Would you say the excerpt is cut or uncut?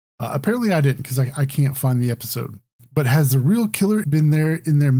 cut